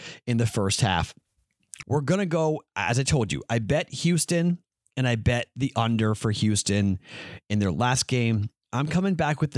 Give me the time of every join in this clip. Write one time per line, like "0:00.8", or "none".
0:01.8